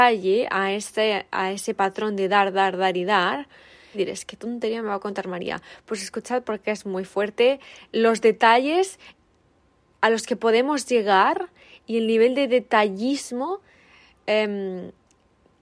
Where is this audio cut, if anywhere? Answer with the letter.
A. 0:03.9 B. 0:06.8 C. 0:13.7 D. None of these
A